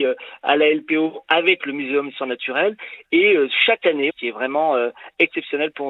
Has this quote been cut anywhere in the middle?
yes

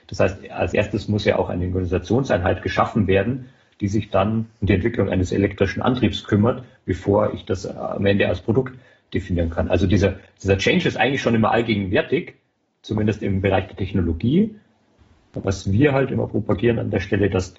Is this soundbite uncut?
yes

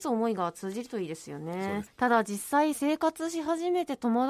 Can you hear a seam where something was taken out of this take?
yes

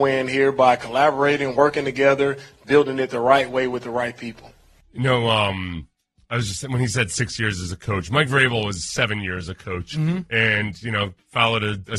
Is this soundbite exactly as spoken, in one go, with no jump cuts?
yes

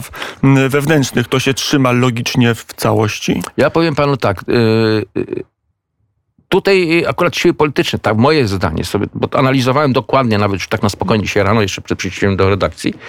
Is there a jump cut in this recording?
no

